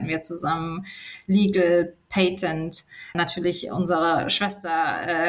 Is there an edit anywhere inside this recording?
yes; 1 cut; at 3.1 s

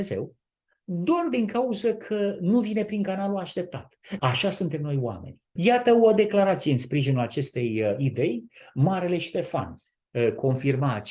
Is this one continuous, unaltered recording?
no; 2 cuts; at 4.2 s, 5.6 s

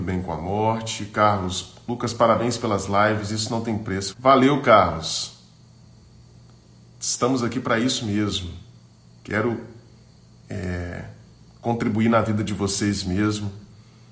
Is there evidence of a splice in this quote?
yes; 1 cut; at 4.1 s

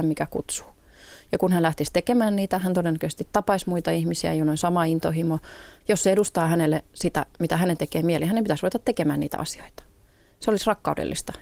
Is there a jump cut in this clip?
yes; 1 cut; at 5.8 s

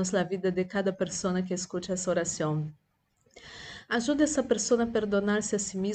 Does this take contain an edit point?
no; 0 cuts

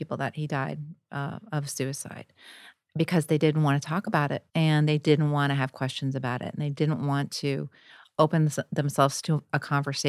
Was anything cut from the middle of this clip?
yes; 1 cut; at 4.5 s

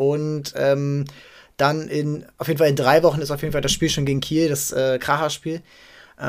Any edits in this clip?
no; 0 cuts

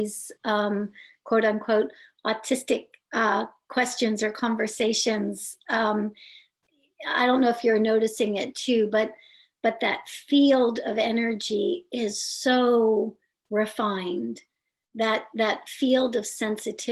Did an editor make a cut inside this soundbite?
no; 0 cuts

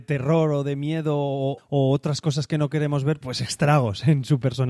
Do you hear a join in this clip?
yes; 2 cuts; at 1.6 s, 3.2 s

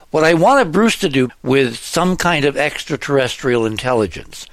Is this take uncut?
no; 1 cut; at 1.3 s

